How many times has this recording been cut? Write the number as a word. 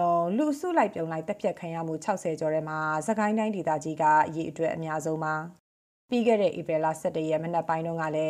zero